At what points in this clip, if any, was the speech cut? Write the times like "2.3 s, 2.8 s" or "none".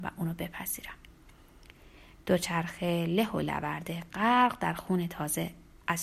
2.2 s